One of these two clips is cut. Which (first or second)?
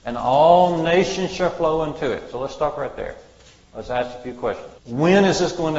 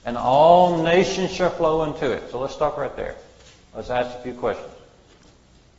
first